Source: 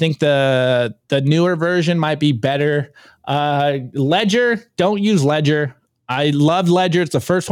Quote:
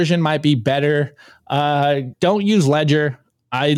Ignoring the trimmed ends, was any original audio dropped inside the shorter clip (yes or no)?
yes